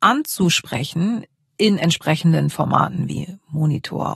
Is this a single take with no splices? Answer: yes; 0 cuts

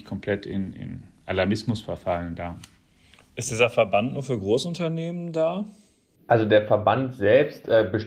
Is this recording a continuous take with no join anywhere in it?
yes; 0 cuts

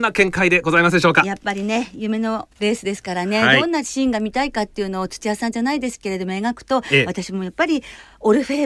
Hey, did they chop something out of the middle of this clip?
yes; 1 cut; at 2.5 s

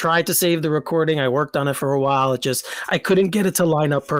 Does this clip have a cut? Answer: no; 0 cuts

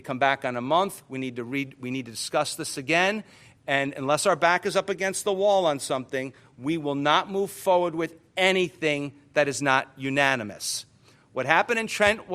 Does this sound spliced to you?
no; 0 cuts

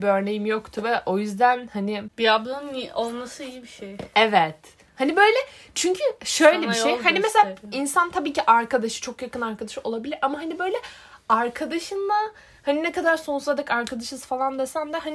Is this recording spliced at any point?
no; 0 cuts

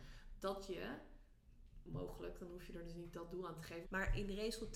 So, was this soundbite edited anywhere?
yes; 1 cut; at 3.8 s

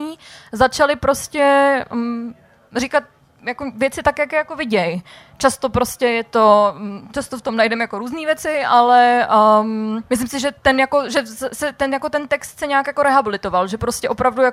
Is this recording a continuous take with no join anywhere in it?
no; 1 cut; at 10.1 s

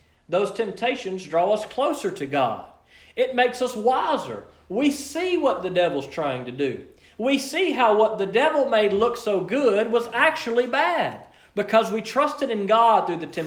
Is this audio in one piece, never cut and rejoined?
yes; 0 cuts

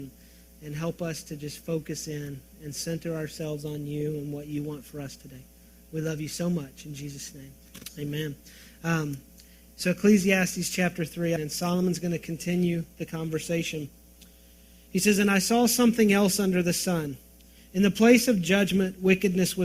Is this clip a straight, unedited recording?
no; 1 cut; at 11.4 s

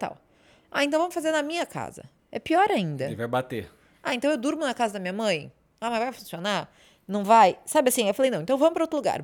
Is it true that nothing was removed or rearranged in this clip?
no; 1 cut; at 2.2 s

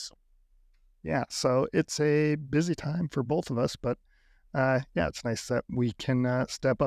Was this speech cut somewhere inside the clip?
no; 0 cuts

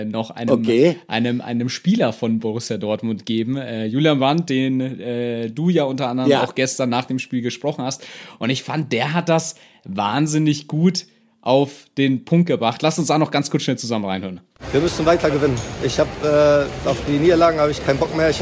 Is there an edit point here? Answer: no; 0 cuts

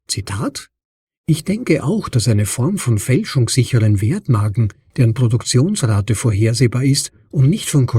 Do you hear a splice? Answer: no; 0 cuts

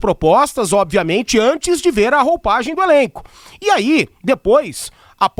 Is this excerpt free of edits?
yes; 0 cuts

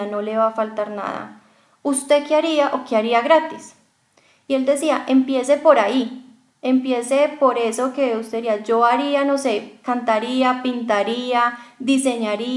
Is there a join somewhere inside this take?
no; 0 cuts

